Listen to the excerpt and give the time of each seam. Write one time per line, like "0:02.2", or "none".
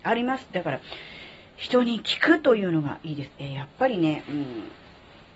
0:03.3